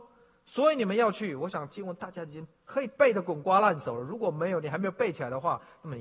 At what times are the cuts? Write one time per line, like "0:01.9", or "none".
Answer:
none